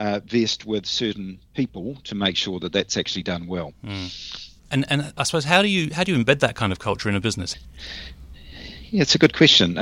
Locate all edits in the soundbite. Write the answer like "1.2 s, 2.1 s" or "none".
4.6 s, 7.5 s